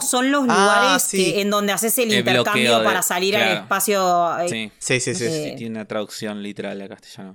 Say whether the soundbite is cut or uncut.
cut